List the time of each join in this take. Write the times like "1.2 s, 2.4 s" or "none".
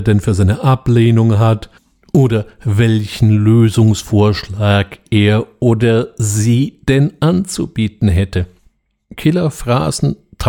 none